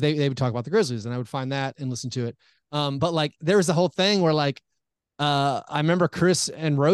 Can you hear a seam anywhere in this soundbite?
no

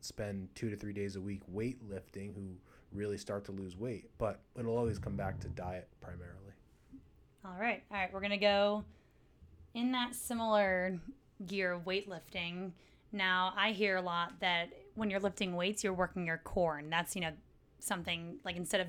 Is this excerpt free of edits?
yes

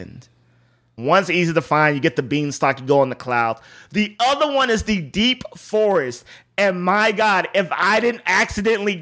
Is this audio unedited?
no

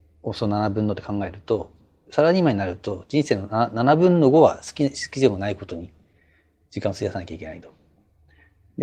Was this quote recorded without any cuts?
yes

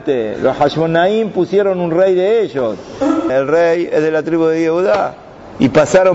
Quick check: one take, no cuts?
no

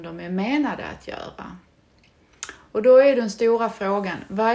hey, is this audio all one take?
yes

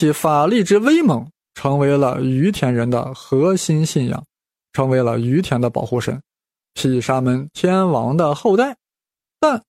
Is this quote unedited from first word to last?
no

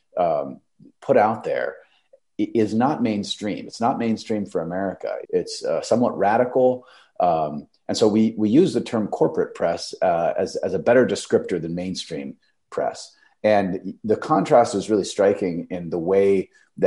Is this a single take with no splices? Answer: no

